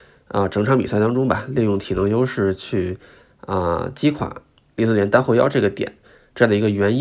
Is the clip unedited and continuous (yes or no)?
yes